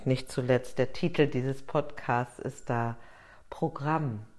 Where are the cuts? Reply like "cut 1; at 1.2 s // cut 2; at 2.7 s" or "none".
none